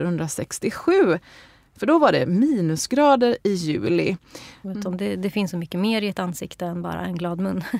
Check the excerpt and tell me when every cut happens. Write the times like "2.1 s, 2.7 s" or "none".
4.6 s

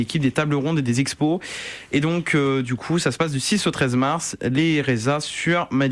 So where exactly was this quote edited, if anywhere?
none

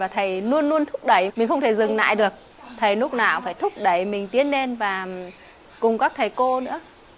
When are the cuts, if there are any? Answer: 1.3 s

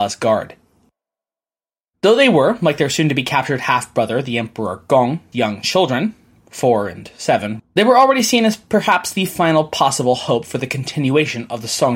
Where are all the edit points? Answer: 5.3 s, 7.6 s

